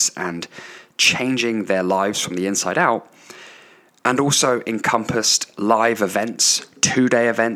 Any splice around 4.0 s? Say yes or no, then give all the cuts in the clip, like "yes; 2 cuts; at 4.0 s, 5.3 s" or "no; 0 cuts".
no; 0 cuts